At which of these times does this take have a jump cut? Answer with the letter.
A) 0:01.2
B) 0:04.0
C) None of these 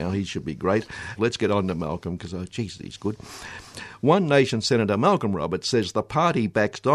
A